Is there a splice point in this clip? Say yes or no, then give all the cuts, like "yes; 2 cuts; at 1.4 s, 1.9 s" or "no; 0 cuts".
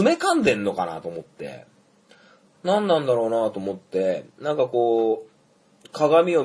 yes; 1 cut; at 2.5 s